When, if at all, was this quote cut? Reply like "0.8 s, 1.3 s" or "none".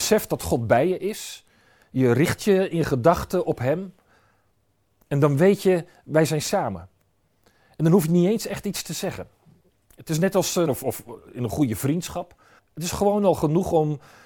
10.7 s, 12.6 s